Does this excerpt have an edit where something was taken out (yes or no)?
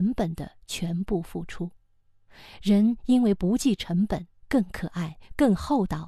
yes